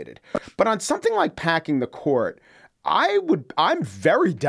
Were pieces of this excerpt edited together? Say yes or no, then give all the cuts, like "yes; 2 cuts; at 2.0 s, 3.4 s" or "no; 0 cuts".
no; 0 cuts